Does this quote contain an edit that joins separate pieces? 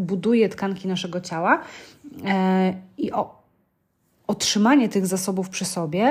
no; 0 cuts

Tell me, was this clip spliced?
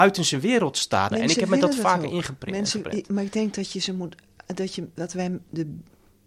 yes; 1 cut; at 1.1 s

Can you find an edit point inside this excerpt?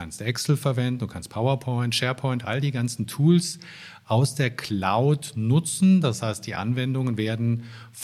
no; 0 cuts

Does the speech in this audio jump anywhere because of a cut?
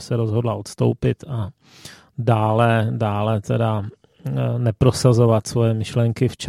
no; 0 cuts

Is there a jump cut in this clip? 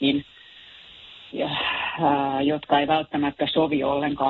yes; 1 cut; at 1.3 s

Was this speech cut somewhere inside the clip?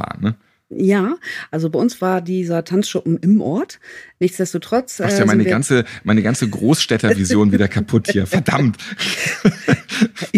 no; 0 cuts

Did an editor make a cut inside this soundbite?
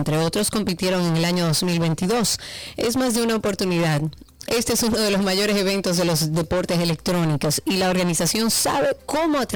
yes; 2 cuts; at 2.7 s, 4.5 s

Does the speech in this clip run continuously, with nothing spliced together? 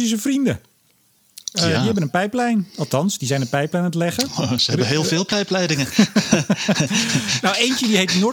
yes; 0 cuts

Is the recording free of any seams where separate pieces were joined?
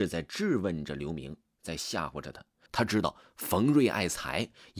no; 1 cut; at 2.7 s

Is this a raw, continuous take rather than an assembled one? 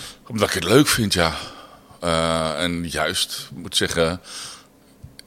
yes; 0 cuts

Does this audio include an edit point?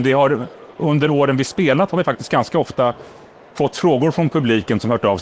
no; 0 cuts

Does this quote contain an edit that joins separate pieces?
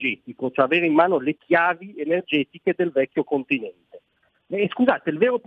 yes; 1 cut; at 4.5 s

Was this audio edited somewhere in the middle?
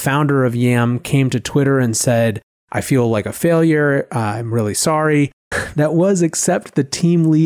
yes; 1 cut; at 5.5 s

